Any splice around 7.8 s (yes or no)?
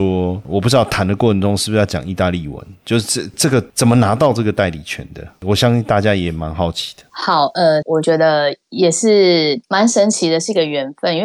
yes